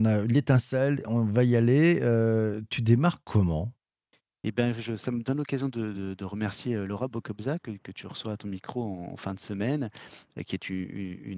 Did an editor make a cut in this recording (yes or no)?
no